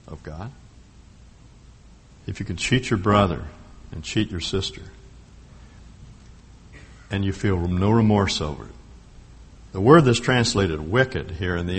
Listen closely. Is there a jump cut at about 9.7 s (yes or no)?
yes